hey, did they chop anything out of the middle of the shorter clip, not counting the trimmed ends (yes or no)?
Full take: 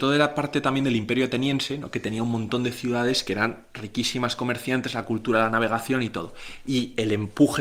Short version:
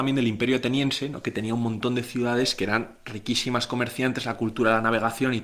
no